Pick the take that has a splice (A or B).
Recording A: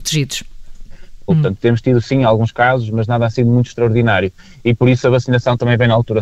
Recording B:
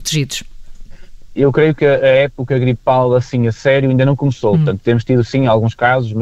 A